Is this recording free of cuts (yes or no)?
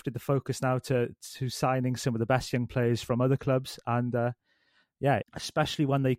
no